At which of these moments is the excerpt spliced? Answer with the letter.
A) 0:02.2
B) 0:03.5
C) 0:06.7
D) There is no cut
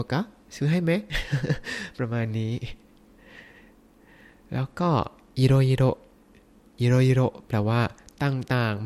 D